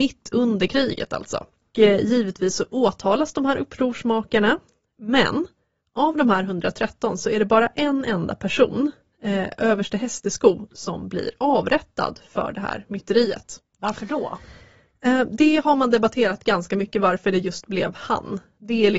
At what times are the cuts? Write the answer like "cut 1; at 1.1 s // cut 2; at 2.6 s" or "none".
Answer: none